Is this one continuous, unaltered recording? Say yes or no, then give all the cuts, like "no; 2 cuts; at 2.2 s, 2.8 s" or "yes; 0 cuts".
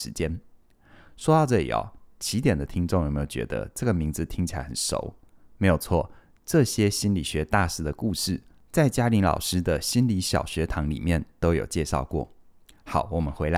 yes; 0 cuts